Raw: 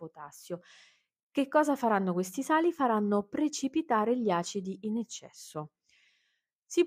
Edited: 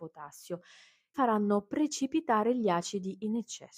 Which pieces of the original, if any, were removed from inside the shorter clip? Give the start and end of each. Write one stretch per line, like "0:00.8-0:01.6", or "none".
0:01.1-0:02.8